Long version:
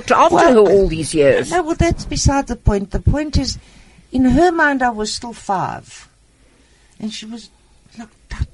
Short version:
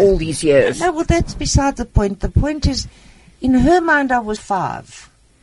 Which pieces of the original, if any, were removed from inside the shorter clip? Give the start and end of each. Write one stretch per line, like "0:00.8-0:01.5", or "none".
0:05.1-0:05.3